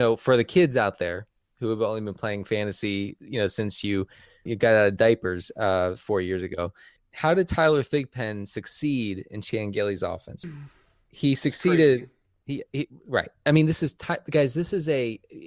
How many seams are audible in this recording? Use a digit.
3